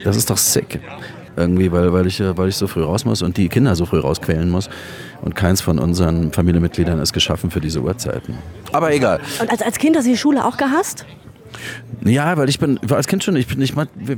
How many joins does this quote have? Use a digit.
2